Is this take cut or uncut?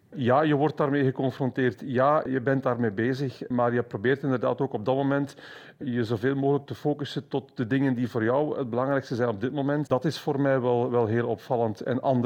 cut